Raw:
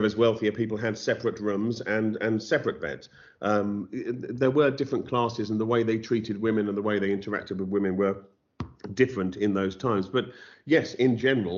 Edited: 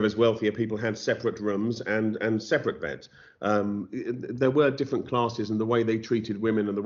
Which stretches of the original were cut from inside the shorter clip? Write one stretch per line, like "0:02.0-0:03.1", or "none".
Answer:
none